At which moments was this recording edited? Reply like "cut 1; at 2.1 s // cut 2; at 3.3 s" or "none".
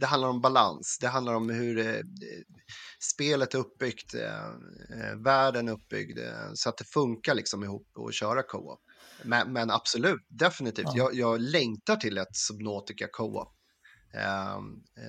none